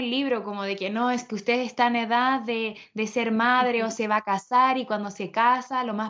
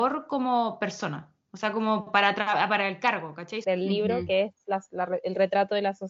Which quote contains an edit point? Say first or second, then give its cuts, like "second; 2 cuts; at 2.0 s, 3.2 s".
second; 1 cut; at 3.6 s